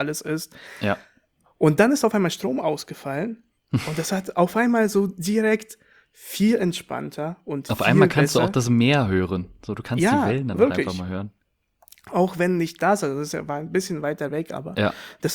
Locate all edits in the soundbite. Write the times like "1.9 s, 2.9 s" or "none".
3.5 s